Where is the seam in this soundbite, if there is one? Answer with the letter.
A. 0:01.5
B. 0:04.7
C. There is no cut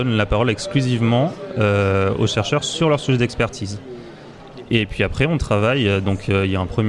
C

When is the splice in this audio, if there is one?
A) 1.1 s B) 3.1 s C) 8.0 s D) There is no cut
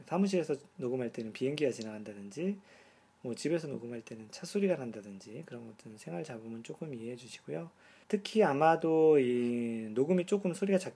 C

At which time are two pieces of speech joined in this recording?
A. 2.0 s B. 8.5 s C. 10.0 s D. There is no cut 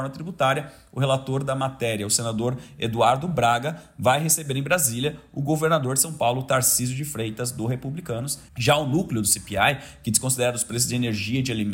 B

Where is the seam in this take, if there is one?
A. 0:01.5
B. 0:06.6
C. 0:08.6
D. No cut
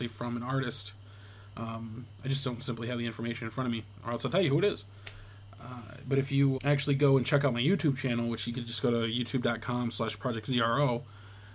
B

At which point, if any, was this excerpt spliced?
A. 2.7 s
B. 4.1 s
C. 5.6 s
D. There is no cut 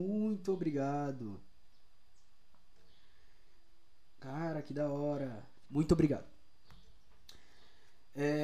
C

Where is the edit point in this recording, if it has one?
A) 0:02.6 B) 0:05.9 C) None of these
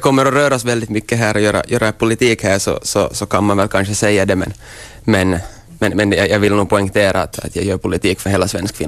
C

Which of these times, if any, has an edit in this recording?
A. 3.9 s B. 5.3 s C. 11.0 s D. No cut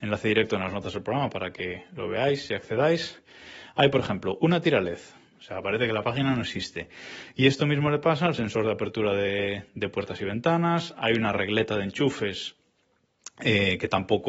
B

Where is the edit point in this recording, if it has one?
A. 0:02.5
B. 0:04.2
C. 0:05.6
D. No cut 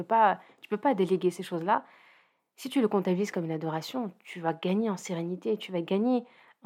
D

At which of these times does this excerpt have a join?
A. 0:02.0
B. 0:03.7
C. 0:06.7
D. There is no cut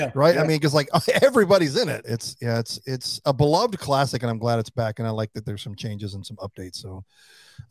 A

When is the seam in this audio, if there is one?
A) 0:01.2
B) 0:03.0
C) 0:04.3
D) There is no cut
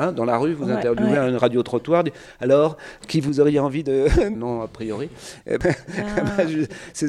C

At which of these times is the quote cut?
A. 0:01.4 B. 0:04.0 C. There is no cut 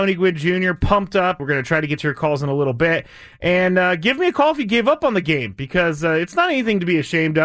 A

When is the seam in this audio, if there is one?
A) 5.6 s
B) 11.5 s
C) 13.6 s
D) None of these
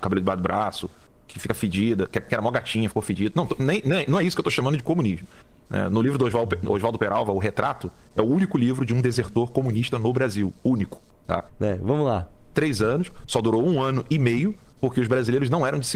B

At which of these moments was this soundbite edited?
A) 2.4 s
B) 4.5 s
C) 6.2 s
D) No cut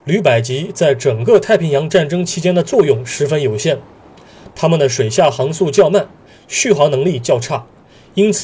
B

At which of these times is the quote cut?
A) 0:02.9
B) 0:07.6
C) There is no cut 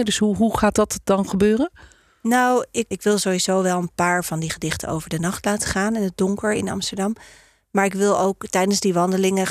A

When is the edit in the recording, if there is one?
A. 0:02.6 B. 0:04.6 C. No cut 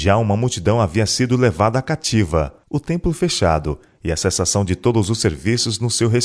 A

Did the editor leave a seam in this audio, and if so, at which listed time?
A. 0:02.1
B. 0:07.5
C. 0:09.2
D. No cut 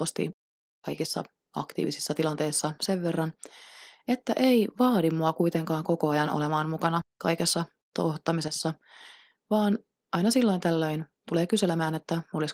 D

